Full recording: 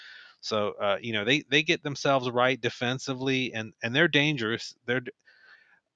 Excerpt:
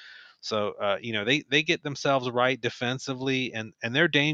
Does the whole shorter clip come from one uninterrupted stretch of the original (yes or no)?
yes